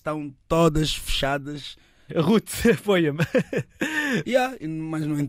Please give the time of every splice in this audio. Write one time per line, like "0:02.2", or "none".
0:02.1
0:04.2